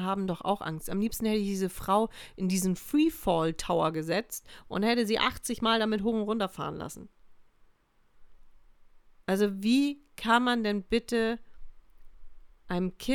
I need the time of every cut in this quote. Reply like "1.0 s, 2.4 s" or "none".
none